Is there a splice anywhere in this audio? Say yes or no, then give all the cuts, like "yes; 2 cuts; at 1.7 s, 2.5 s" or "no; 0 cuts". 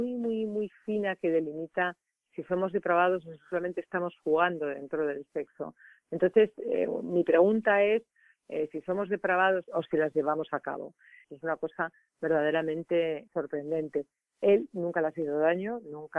yes; 3 cuts; at 9.7 s, 11.2 s, 13.3 s